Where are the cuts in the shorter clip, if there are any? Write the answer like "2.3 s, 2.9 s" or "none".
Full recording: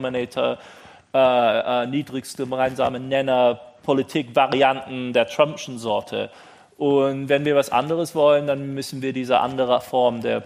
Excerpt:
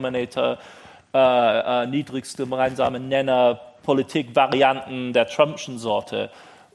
none

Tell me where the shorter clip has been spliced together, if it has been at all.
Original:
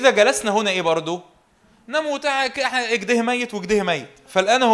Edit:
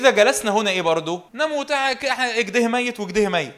1.3 s

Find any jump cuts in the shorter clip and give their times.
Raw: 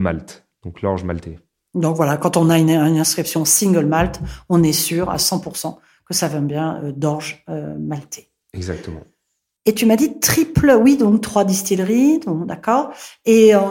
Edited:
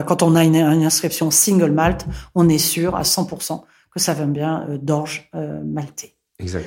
none

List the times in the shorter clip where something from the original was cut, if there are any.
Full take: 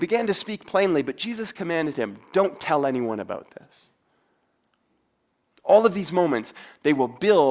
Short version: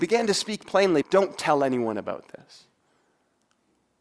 1.0 s

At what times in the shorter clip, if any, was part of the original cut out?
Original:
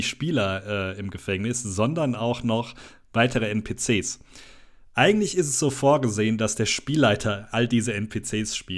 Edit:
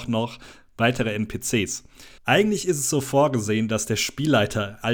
2.2 s

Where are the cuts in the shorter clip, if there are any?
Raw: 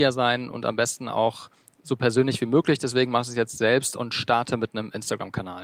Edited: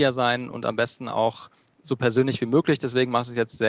none

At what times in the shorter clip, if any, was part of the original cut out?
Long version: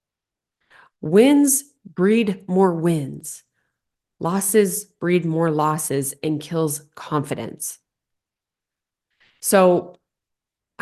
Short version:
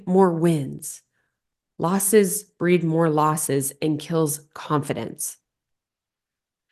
none

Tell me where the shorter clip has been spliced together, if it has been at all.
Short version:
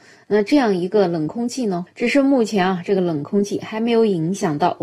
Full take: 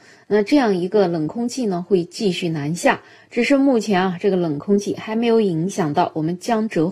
1.9 s

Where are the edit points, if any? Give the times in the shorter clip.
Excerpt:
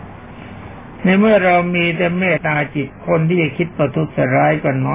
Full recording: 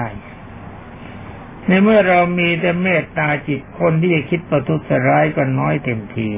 2.4 s

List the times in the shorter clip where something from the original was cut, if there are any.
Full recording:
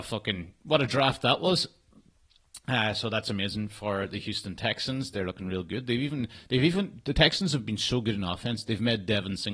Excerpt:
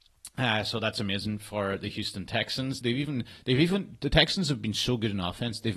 2.8 s

